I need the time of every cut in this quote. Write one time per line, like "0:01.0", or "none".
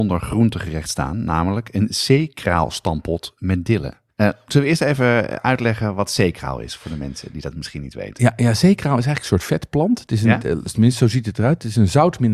0:04.1